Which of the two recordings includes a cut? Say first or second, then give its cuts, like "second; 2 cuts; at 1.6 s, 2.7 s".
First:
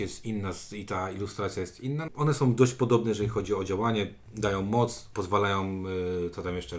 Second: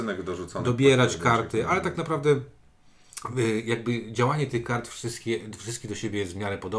first; 2 cuts; at 2.1 s, 5.1 s